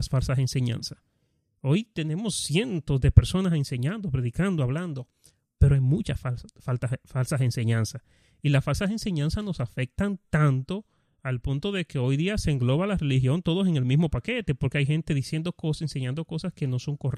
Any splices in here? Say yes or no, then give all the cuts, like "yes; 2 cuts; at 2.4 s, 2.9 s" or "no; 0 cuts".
no; 0 cuts